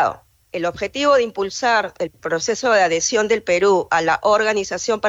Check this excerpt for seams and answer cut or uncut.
uncut